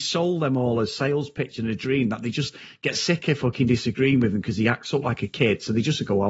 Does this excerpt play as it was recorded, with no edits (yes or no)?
yes